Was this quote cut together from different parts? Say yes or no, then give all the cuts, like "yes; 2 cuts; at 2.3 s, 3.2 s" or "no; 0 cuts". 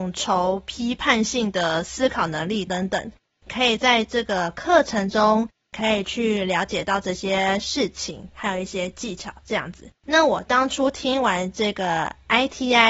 yes; 2 cuts; at 2.7 s, 10.0 s